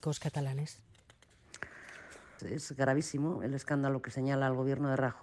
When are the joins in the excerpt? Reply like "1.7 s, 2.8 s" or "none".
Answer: 2.4 s